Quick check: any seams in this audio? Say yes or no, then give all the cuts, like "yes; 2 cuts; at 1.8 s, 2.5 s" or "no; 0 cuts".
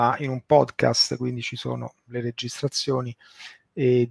no; 0 cuts